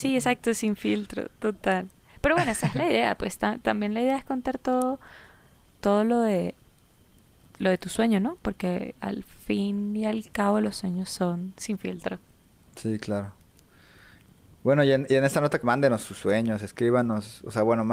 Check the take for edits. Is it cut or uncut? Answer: cut